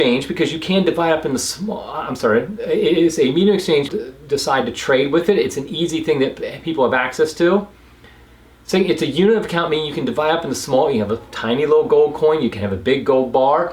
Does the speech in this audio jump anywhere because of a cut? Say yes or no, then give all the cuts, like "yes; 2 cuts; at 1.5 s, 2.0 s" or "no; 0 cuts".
yes; 1 cut; at 3.9 s